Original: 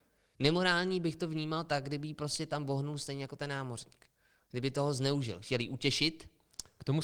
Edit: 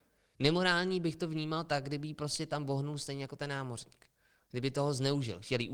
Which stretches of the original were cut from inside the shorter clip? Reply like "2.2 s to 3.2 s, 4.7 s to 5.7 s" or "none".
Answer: none

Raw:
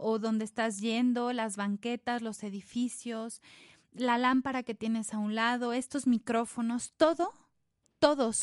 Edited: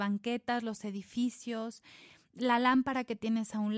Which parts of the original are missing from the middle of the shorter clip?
none

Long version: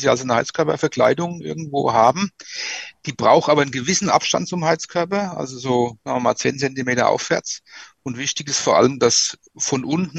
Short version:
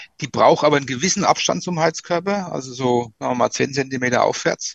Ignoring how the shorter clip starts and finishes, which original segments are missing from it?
none

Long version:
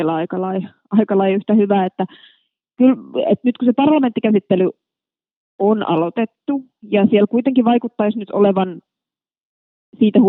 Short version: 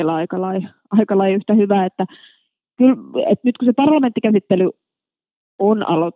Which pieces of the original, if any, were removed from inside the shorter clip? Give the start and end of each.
none

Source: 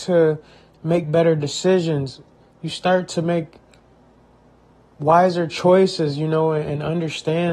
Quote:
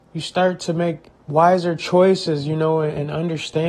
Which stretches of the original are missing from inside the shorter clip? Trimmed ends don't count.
3.6 s to 4.9 s

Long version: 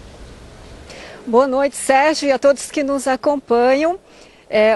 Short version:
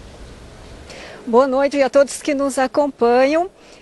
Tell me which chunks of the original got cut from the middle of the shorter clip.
1.7 s to 2.2 s

